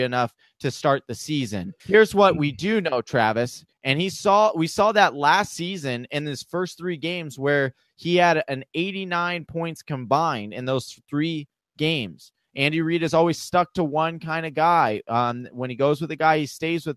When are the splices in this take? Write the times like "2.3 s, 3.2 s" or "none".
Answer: 1.8 s, 3.7 s, 12.4 s